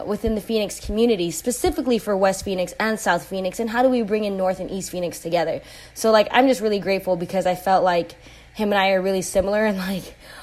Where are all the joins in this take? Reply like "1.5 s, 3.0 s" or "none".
none